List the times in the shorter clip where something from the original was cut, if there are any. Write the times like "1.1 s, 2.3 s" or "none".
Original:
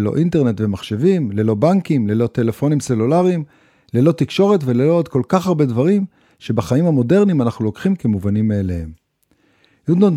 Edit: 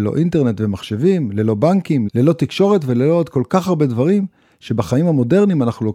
2.1 s